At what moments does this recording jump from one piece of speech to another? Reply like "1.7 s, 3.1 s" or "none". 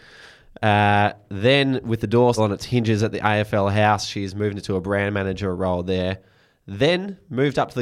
2.4 s